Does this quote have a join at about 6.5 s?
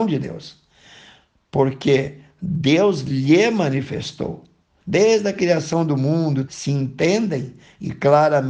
yes; 2 cuts; at 4.8 s, 6.5 s

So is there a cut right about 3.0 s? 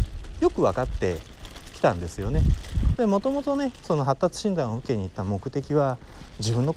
yes; 1 cut; at 3.0 s

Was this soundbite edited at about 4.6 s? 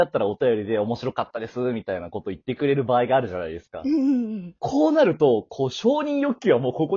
yes; 1 cut; at 4.6 s

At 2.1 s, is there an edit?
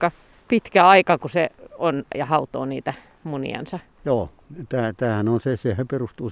yes; 2 cuts; at 2.1 s, 4.0 s

